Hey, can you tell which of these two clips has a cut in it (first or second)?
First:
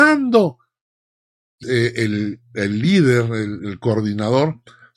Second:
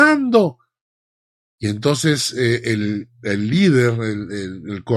first